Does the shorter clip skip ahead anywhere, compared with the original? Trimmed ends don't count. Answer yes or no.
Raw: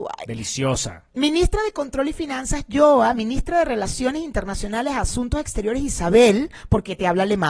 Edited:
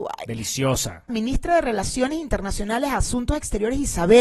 yes